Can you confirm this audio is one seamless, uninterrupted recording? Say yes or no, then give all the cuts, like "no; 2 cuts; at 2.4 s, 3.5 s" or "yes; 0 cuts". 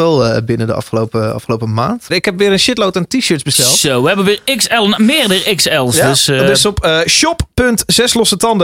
no; 1 cut; at 2.1 s